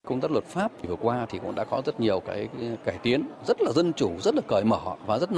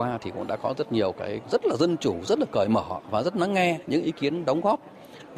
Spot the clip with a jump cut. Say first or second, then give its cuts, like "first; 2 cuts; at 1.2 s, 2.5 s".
second; 1 cut; at 1.4 s